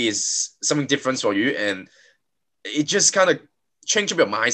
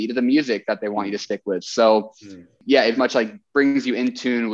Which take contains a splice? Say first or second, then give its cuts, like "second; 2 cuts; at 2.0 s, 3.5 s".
second; 1 cut; at 3.0 s